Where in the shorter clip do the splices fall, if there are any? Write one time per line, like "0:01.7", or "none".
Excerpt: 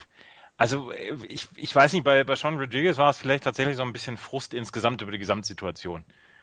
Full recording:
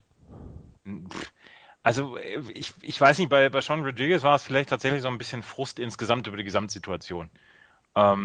none